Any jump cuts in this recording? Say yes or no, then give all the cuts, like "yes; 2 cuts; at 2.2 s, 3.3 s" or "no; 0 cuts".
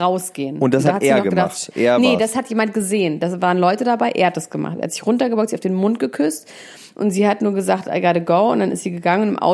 no; 0 cuts